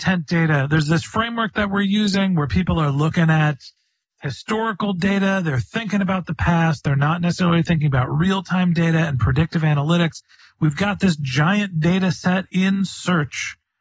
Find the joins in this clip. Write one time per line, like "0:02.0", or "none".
none